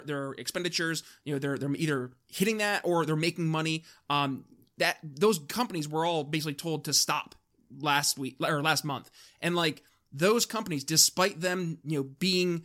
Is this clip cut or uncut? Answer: uncut